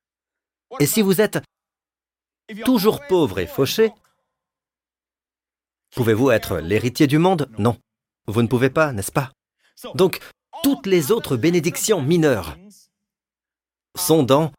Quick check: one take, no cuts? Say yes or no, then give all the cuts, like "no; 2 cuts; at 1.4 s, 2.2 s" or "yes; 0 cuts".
yes; 0 cuts